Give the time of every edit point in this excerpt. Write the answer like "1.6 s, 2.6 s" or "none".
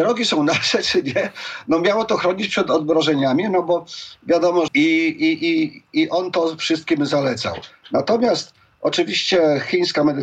4.7 s

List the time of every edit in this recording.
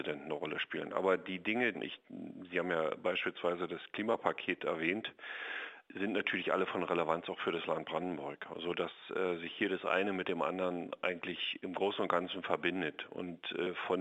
1.7 s

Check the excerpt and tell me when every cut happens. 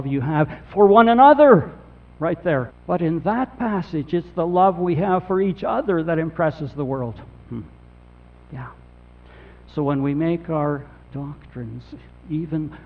2.7 s, 11.0 s

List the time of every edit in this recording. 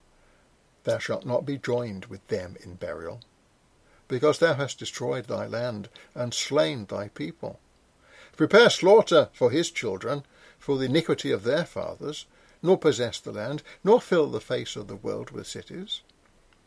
8.3 s, 12.6 s

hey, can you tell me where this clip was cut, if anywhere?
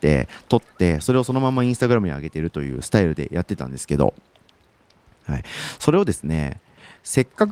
none

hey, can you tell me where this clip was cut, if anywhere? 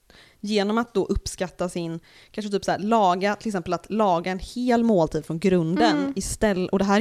none

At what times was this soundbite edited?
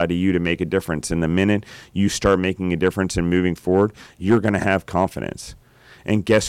none

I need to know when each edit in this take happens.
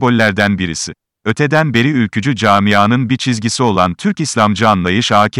1.1 s

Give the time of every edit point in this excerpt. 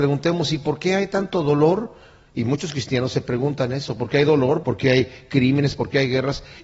4.6 s

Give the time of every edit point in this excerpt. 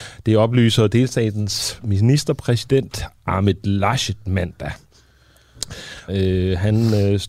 6.1 s

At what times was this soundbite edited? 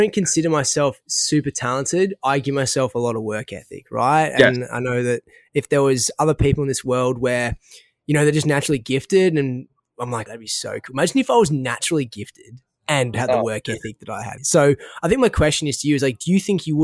10.3 s, 14.4 s

